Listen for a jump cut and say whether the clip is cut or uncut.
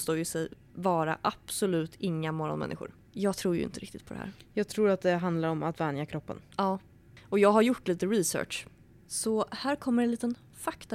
cut